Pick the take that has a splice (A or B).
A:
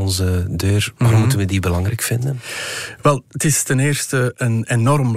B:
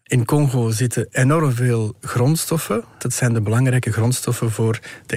B